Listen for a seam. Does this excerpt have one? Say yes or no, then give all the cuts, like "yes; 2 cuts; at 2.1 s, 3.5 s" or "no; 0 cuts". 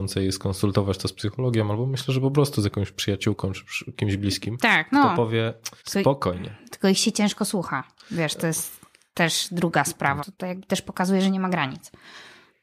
yes; 2 cuts; at 5.8 s, 10.2 s